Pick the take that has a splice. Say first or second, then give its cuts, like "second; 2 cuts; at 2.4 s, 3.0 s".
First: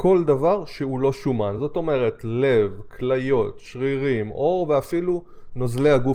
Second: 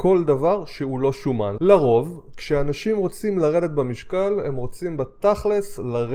second; 1 cut; at 1.6 s